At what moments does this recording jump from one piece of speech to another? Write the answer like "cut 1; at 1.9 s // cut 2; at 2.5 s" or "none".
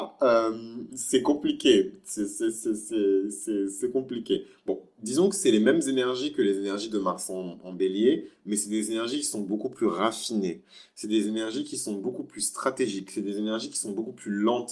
none